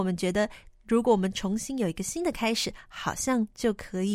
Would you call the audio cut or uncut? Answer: uncut